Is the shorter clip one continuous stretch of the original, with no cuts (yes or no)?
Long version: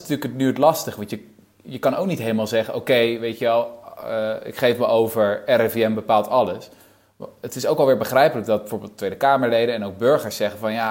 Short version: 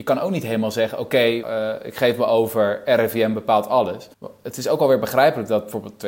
no